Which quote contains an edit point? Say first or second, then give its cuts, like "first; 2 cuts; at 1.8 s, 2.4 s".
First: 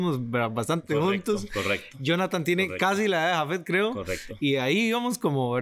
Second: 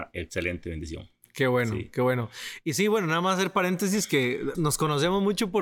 second; 1 cut; at 4.5 s